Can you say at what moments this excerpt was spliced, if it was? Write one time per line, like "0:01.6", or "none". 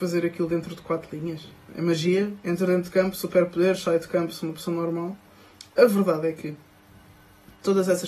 0:01.7